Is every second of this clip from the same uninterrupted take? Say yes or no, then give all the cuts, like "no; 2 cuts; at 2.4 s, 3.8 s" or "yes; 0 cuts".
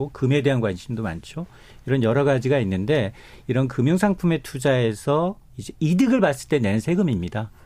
yes; 0 cuts